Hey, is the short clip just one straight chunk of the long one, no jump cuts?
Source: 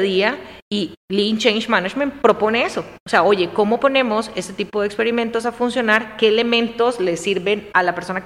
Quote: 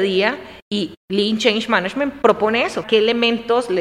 no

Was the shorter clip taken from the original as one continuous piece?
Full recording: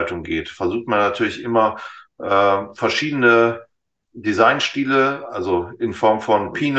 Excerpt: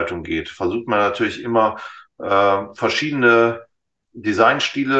yes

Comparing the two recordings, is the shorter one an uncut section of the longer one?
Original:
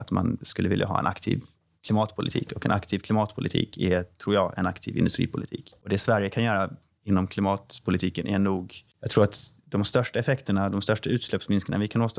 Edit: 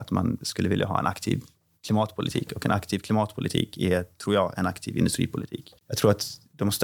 no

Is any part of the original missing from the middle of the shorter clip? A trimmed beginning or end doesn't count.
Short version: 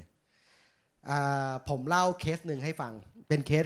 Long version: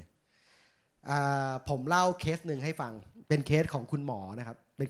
no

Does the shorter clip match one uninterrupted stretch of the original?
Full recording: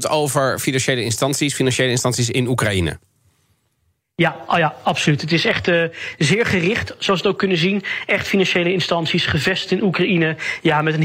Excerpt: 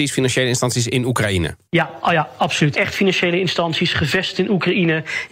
no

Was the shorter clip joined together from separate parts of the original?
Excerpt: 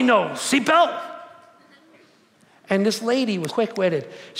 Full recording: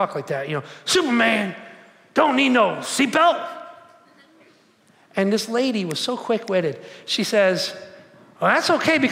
yes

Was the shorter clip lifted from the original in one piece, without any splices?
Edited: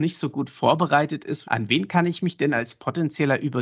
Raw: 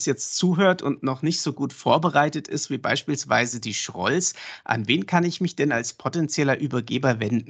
no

